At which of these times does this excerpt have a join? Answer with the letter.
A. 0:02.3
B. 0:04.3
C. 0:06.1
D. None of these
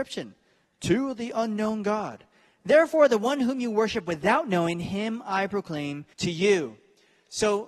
C